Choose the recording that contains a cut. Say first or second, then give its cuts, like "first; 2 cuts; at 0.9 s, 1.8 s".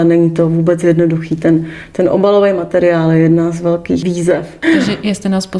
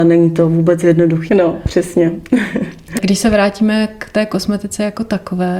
second; 1 cut; at 1.3 s